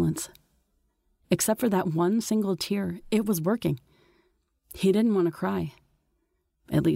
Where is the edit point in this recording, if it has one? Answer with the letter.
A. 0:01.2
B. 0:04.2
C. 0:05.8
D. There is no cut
A